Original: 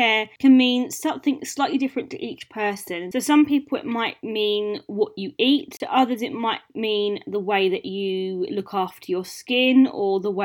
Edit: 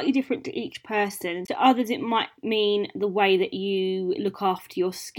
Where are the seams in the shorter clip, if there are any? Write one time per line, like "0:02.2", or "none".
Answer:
0:01.5